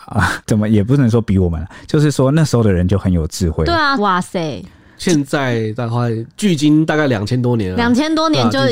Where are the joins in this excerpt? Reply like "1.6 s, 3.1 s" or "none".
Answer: 4.0 s